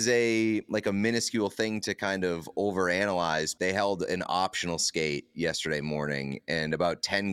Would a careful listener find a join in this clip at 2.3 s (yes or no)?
no